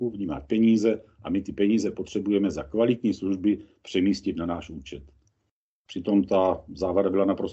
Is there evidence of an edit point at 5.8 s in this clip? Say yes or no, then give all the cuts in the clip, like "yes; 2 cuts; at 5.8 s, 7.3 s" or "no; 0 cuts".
yes; 1 cut; at 5.8 s